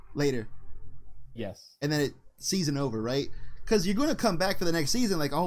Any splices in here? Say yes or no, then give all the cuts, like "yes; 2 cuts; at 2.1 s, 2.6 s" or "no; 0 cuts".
no; 0 cuts